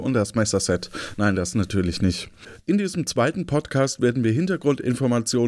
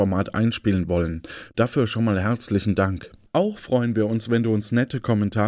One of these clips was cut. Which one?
second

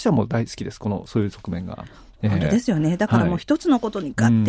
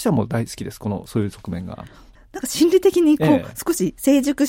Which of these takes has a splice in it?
second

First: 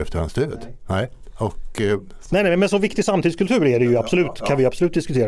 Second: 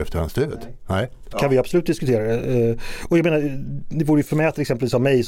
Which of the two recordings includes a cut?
second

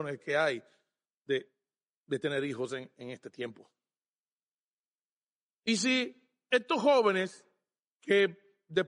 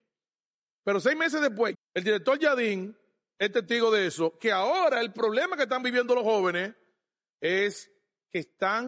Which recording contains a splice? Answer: second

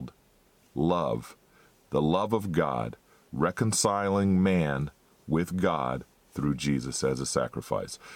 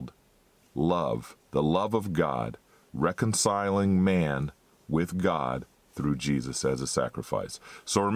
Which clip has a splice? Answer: second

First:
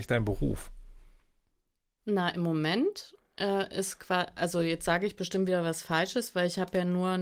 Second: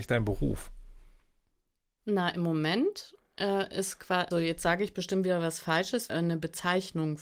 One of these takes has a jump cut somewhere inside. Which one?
second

